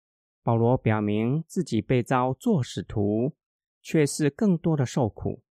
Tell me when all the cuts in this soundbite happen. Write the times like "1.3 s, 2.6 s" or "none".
none